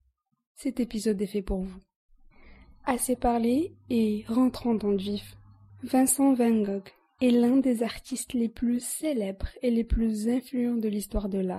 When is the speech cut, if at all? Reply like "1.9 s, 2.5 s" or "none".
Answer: 5.7 s